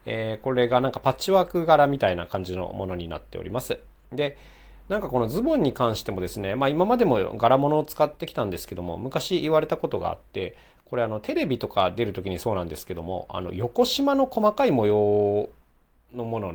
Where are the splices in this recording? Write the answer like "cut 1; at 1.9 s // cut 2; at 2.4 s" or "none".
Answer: none